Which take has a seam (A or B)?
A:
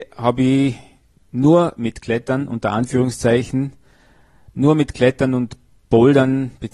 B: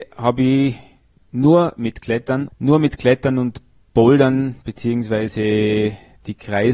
B